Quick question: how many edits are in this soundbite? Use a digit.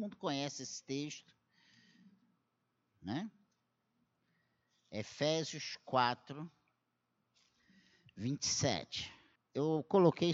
1